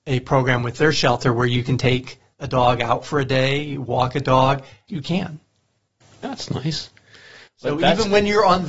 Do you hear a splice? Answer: yes; 1 cut; at 4.9 s

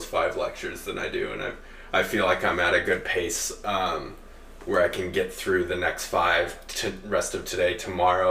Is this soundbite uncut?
yes; 0 cuts

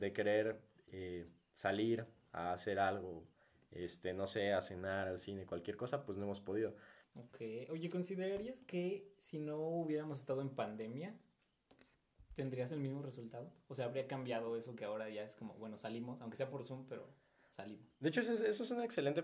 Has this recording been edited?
yes; 1 cut; at 7.0 s

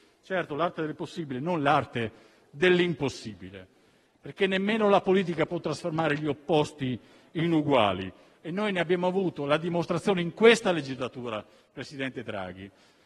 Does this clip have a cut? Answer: no; 0 cuts

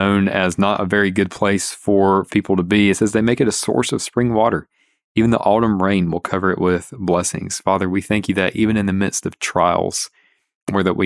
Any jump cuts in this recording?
no; 0 cuts

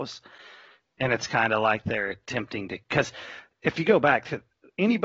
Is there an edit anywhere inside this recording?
no; 0 cuts

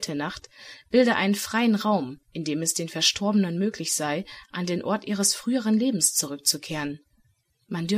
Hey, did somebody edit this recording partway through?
no; 0 cuts

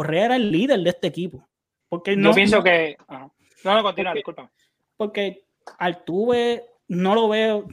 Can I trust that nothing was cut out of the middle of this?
no; 1 cut; at 1.8 s

